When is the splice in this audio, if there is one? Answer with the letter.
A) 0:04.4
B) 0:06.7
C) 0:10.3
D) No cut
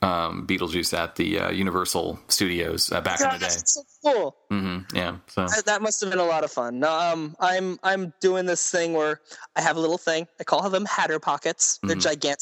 D